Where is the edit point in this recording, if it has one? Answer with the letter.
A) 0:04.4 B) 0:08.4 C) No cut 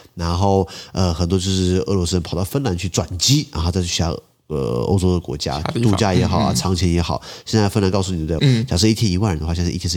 B